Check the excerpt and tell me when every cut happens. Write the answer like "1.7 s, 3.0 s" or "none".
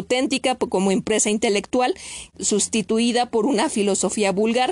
2.3 s

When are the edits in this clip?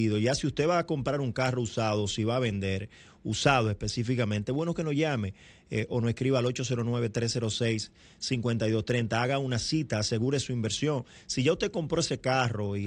none

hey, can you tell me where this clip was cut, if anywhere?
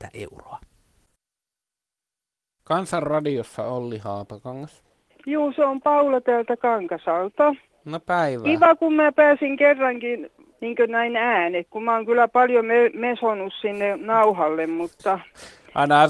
none

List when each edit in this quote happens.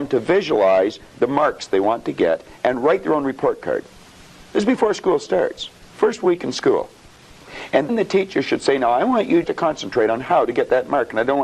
7.9 s, 9.4 s

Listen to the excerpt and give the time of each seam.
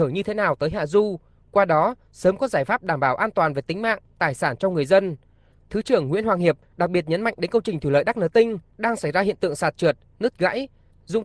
none

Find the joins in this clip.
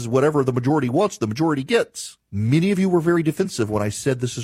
2.2 s

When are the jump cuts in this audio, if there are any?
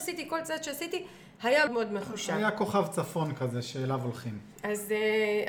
1.7 s, 4.5 s

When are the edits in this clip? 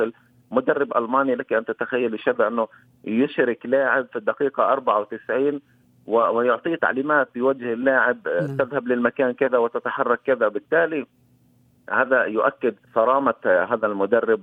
6.8 s, 12.8 s

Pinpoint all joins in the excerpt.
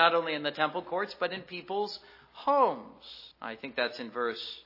3.3 s

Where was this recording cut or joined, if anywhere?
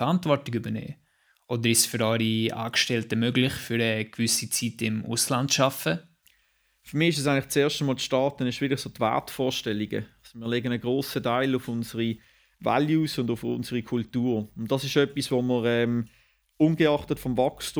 none

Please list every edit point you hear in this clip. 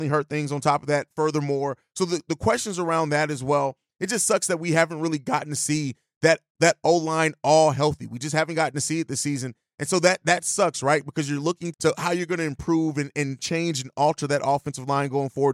11.7 s

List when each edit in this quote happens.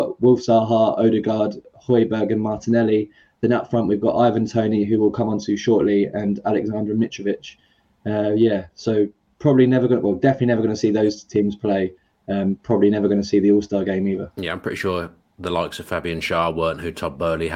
none

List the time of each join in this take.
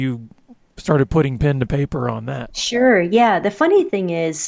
none

